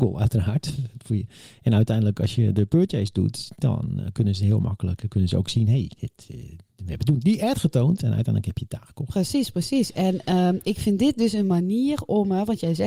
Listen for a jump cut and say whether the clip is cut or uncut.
uncut